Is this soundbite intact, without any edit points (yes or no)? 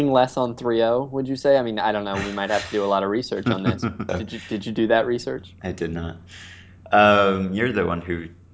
no